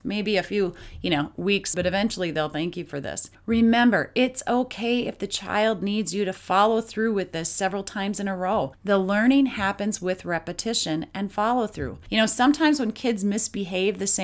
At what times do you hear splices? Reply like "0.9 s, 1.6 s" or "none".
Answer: 1.7 s

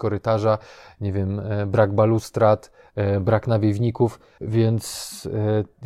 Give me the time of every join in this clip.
4.4 s

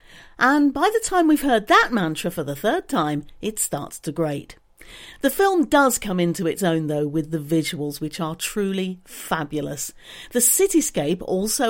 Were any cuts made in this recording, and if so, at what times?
none

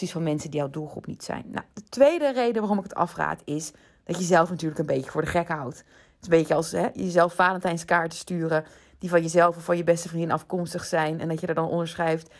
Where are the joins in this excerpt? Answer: none

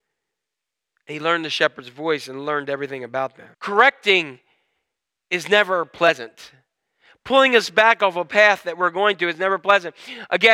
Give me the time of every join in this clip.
3.5 s

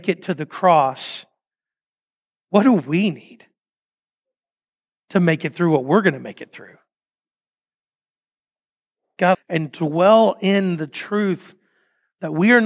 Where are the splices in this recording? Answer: 9.3 s

